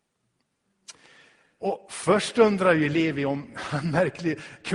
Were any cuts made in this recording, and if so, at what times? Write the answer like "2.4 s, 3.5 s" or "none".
1.6 s

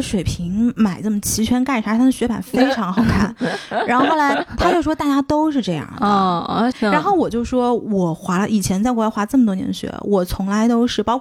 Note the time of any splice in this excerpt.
6.7 s

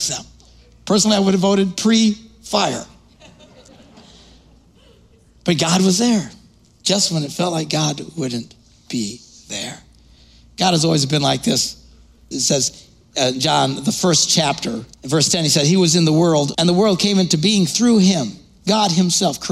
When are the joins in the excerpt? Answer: 12.3 s, 14.9 s, 16.5 s

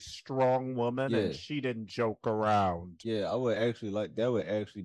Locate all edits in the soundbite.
none

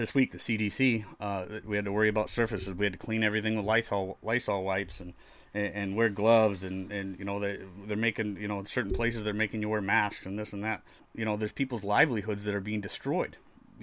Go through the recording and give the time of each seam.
1.6 s, 11.0 s

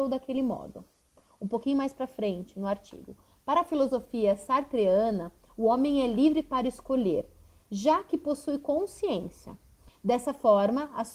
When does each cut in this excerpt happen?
9.9 s

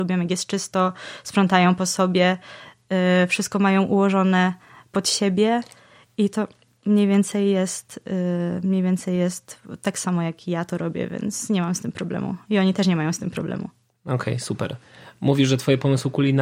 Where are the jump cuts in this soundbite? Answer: none

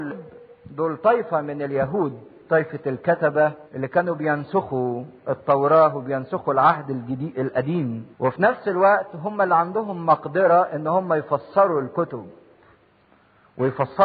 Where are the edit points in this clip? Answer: 3.7 s, 8.1 s

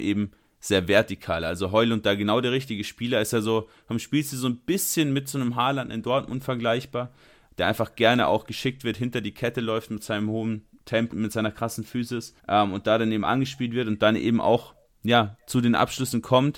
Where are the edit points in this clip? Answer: 11.1 s, 12.4 s

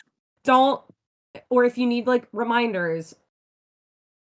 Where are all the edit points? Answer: none

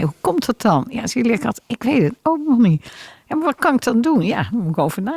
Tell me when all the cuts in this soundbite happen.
none

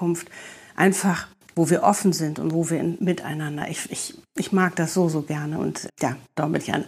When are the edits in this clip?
3.0 s, 5.9 s

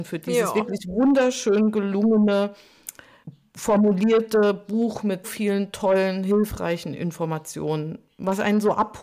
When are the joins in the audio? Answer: 5.2 s

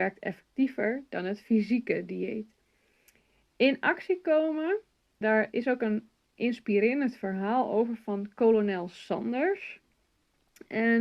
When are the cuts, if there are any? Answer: 5.2 s

